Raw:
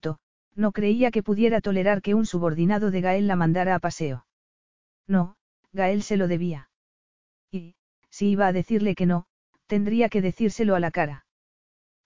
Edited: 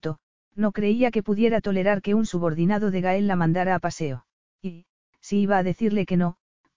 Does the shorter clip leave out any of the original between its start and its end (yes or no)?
yes